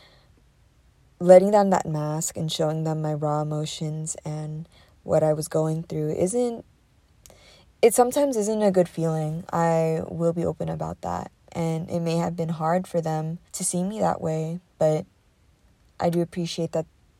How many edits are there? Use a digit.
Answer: 2